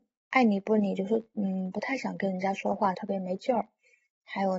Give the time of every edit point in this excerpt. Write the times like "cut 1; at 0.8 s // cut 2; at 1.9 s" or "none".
cut 1; at 2.9 s